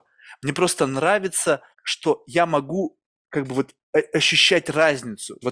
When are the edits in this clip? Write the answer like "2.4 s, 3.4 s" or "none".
1.7 s